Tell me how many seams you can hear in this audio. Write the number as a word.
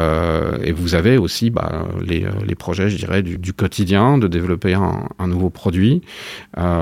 one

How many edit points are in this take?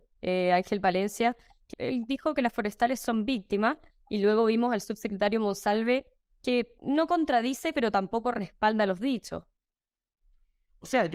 two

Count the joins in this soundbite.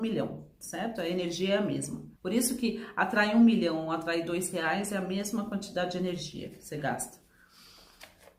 one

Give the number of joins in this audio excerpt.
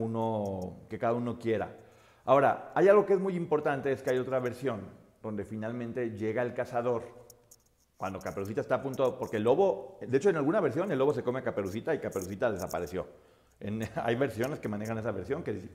zero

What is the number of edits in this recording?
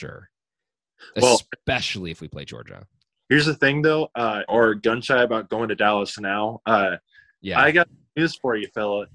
one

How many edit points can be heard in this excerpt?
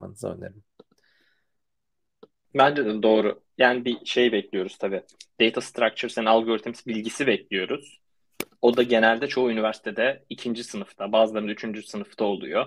one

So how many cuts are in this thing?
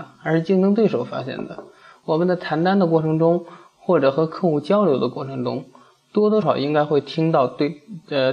one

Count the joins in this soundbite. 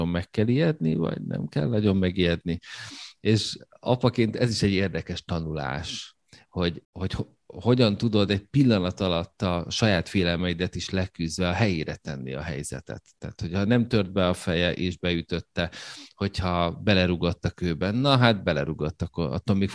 one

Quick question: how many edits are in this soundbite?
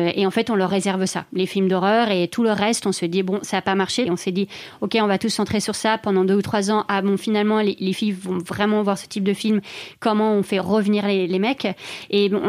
one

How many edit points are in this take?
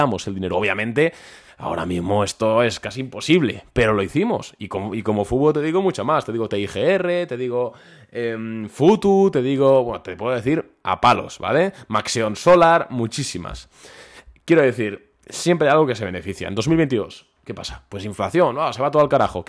zero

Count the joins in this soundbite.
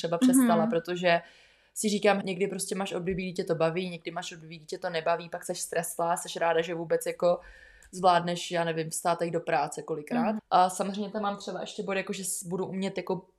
two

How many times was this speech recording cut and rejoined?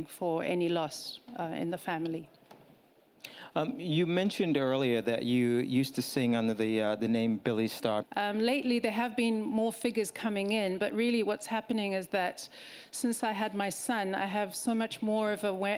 one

